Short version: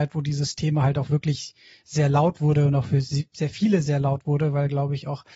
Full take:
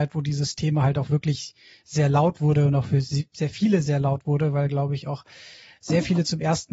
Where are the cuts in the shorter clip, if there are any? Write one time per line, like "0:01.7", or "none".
none